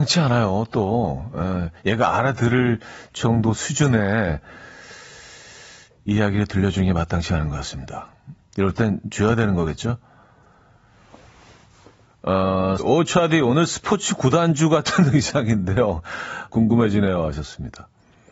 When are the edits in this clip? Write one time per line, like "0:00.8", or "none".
0:08.3
0:12.8
0:16.5